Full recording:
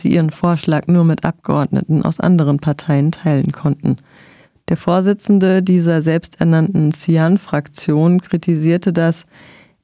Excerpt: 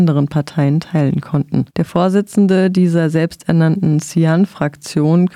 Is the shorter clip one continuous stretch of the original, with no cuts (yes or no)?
no